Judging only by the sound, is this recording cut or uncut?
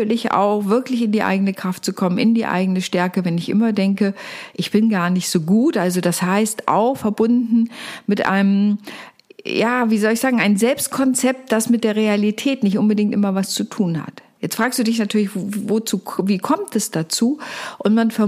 uncut